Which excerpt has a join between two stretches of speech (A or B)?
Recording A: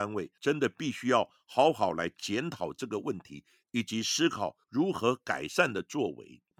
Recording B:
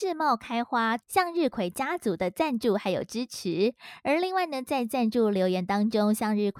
B